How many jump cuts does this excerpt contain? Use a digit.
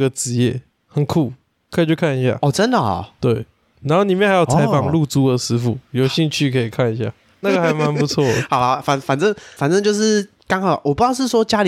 1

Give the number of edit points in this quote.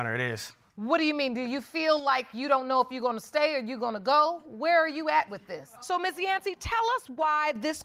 1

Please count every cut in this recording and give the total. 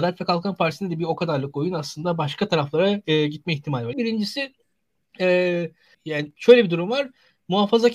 2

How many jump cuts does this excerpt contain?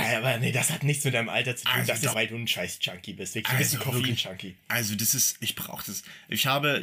2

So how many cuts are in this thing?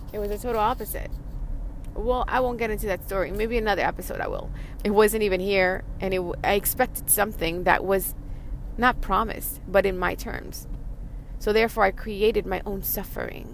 1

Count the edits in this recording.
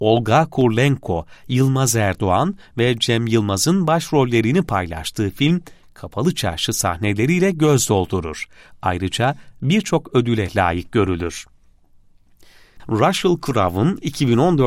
1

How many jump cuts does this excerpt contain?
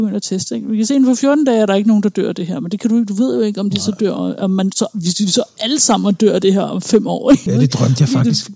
1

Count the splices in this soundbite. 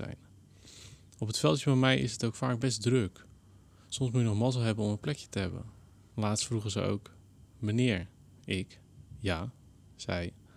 1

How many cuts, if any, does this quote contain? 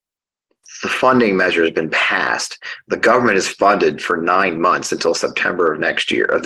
0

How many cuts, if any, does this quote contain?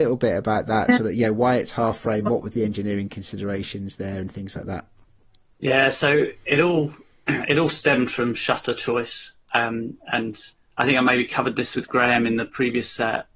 0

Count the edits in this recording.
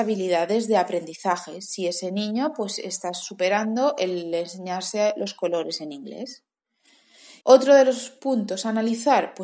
1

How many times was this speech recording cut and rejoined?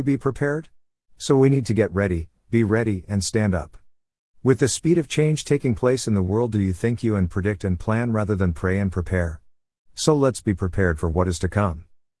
2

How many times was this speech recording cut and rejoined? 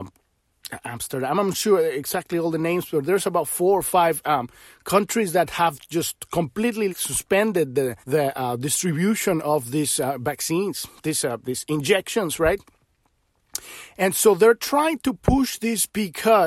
2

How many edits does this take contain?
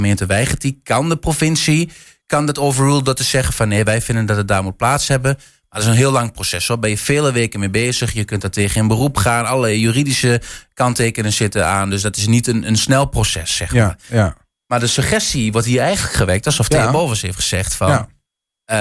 0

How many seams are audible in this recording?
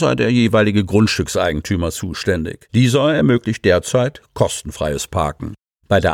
1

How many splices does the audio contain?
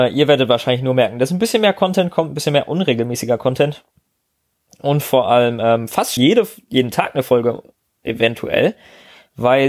1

